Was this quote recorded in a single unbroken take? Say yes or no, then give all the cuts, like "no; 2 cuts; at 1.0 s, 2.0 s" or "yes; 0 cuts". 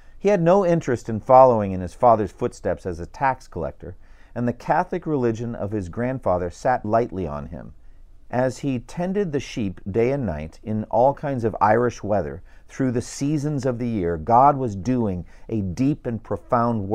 no; 2 cuts; at 6.8 s, 8.3 s